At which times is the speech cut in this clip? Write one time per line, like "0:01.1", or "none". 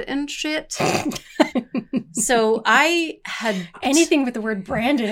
0:01.5
0:03.7